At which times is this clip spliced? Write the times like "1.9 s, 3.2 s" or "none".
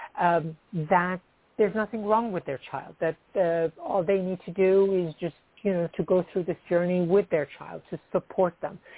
5.9 s